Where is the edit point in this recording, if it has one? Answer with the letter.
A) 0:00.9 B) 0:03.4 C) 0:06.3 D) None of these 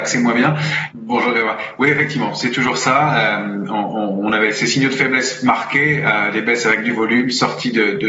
A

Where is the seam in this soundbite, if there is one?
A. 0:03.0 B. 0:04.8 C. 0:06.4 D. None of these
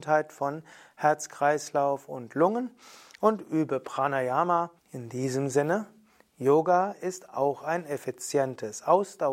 B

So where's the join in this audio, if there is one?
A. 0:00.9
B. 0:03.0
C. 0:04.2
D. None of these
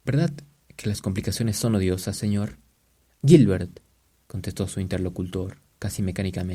D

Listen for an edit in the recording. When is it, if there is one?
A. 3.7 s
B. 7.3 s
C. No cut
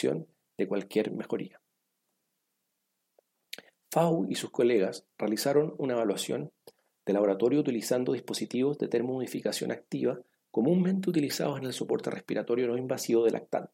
C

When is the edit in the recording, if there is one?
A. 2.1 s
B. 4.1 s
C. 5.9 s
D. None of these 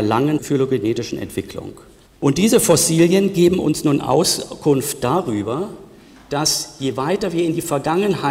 A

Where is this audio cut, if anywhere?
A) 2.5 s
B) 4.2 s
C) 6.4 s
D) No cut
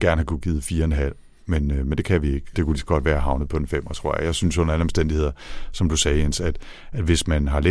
A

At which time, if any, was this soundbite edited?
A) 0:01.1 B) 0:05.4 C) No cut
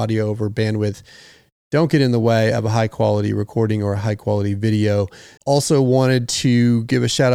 B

